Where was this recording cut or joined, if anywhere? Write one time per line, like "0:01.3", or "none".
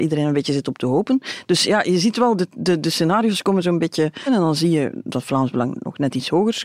0:04.3